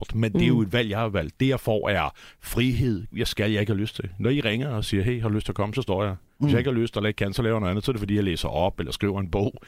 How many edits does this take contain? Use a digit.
1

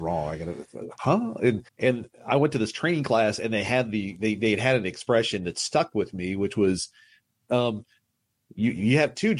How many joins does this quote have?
1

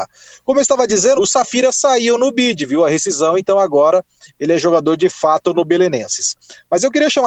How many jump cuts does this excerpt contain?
1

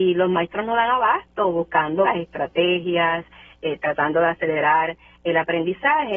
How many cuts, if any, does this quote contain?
1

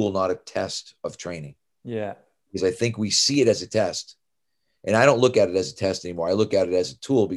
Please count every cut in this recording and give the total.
0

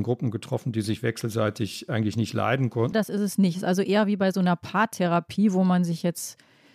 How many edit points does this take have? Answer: 1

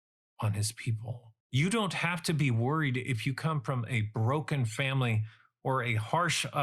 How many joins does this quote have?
1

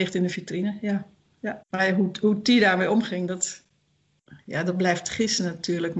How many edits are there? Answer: 1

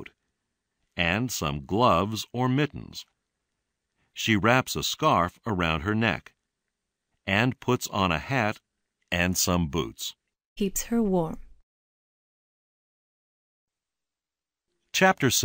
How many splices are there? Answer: 1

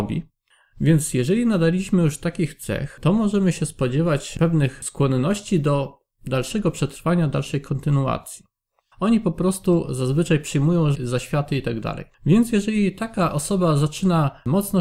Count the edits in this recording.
3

